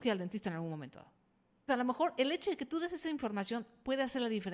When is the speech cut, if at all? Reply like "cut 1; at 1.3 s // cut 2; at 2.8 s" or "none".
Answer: cut 1; at 1.7 s